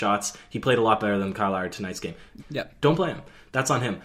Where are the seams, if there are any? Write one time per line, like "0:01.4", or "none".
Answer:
0:02.4